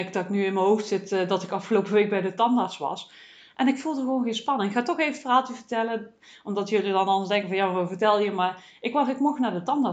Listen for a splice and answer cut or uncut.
uncut